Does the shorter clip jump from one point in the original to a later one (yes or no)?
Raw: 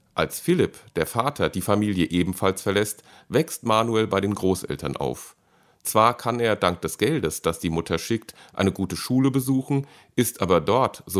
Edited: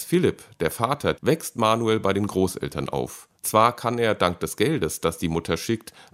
yes